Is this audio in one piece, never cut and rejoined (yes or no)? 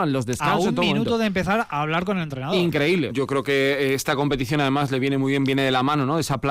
no